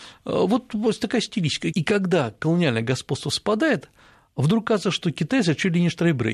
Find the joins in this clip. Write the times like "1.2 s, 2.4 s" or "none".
1.7 s